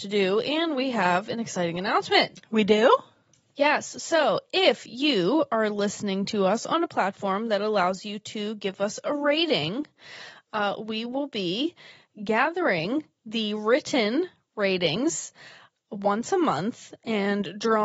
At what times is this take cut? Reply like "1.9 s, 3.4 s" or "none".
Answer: none